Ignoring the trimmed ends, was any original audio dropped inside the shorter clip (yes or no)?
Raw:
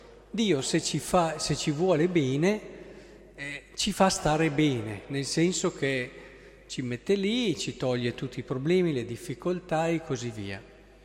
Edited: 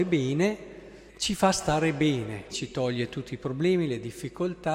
yes